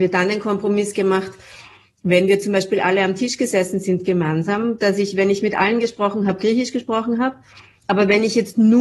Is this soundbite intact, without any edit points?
yes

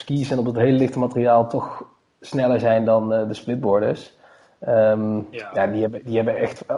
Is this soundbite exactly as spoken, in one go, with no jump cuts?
yes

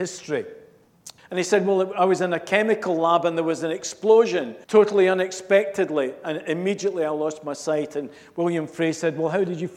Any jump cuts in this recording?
yes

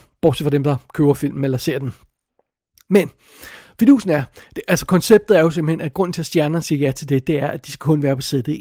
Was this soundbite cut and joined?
no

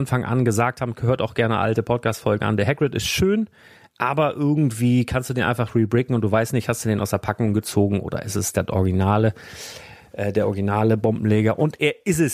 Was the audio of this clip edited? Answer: no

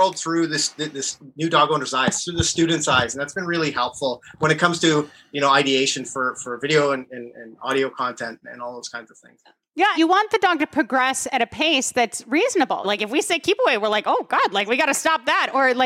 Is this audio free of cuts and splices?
no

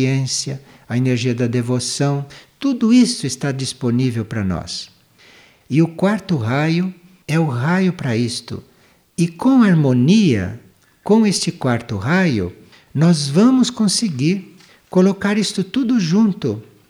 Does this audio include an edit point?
yes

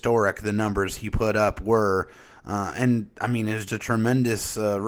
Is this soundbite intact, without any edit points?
no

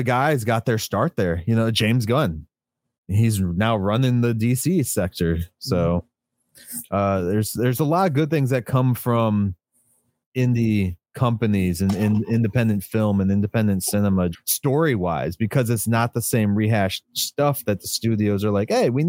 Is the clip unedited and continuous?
no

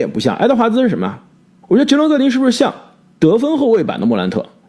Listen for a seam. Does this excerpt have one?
yes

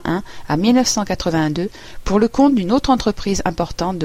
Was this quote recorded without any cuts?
yes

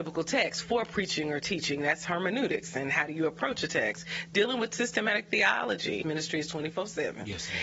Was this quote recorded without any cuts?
no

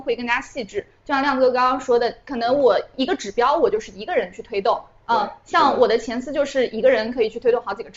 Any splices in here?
no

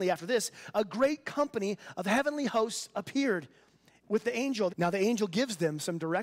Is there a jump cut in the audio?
yes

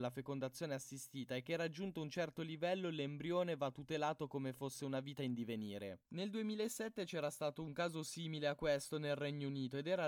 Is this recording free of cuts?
no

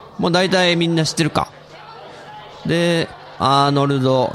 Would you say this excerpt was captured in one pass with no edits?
no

